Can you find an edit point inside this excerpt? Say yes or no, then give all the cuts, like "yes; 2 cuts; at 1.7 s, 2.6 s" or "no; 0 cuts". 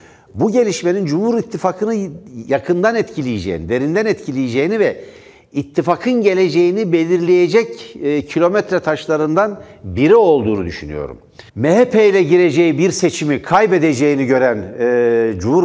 yes; 1 cut; at 11.5 s